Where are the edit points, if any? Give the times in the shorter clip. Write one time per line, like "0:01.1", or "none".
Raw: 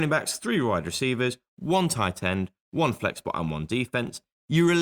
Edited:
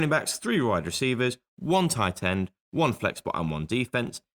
none

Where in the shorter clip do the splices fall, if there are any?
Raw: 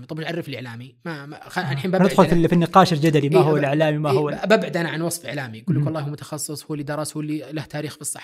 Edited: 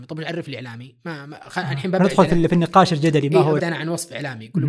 0:03.6

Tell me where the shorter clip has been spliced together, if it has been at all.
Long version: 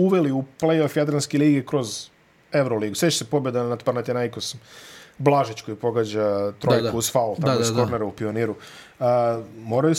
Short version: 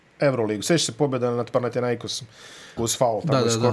0:02.8

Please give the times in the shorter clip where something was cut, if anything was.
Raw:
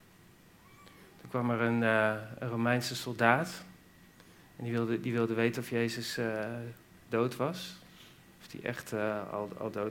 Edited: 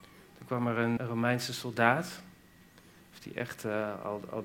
0:01.0
0:03.0

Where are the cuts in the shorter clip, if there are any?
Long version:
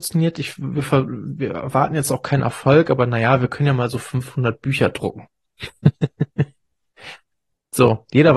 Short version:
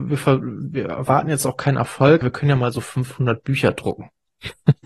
0:02.2

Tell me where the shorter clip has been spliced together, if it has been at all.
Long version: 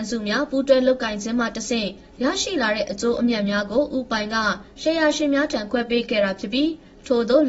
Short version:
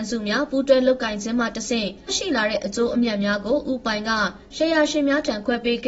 0:02.1

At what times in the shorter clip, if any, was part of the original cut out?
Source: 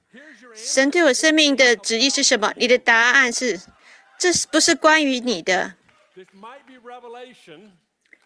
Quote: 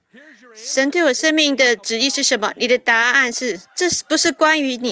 0:03.6

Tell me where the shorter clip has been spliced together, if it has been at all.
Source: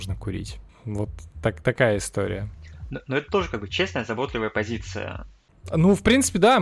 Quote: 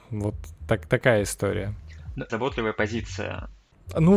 0:02.3

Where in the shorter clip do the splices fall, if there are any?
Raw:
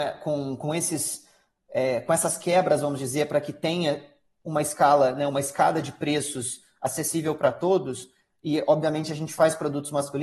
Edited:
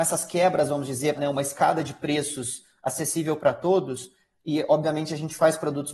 0:01.2

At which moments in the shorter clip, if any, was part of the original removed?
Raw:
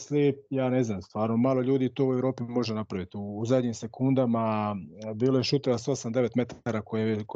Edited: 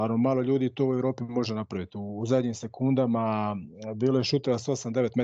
none

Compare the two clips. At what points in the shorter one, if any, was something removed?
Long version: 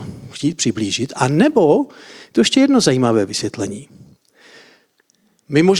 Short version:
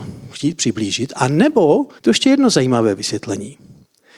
0:02.0

